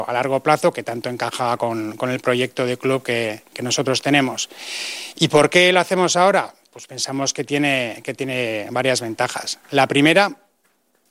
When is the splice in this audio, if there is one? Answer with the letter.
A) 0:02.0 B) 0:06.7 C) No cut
C